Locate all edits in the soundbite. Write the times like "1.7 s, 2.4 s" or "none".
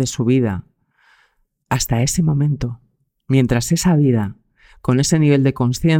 none